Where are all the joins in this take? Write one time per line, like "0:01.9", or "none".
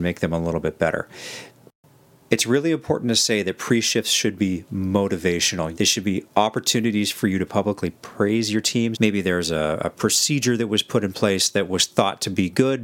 0:05.7
0:08.9

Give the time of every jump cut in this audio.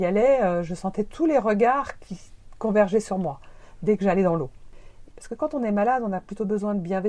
0:05.1

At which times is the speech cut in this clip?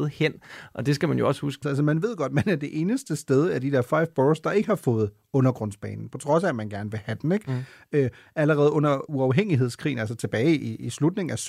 0:01.6

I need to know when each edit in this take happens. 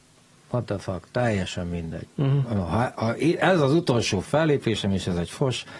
none

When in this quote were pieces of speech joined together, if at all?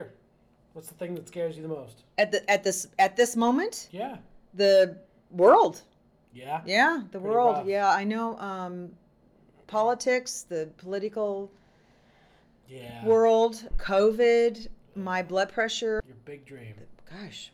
0:13.7
0:16.0

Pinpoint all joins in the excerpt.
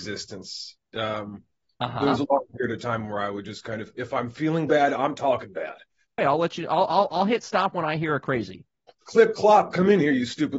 0:06.2
0:08.9

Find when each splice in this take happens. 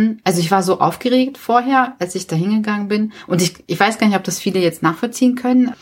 none

